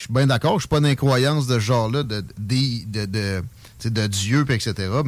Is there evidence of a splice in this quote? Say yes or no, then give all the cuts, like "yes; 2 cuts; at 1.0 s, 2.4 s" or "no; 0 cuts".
no; 0 cuts